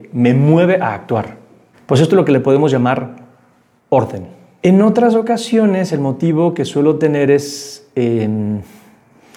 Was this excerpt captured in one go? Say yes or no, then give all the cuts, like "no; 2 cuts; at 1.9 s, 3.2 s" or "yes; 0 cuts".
no; 2 cuts; at 1.7 s, 4.6 s